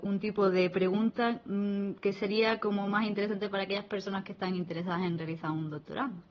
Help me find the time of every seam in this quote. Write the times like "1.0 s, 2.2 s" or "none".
none